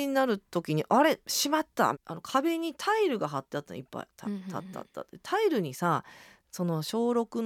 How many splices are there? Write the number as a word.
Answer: one